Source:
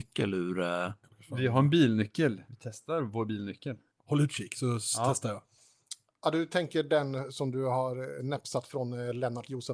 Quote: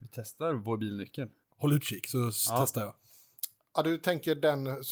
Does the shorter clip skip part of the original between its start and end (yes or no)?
no